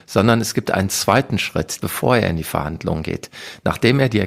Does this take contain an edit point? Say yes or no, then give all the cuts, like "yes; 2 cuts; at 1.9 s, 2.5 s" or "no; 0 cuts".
yes; 1 cut; at 1.8 s